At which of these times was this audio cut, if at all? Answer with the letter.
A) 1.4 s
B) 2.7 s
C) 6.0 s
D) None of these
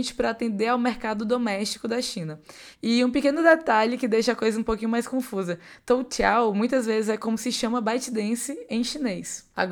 B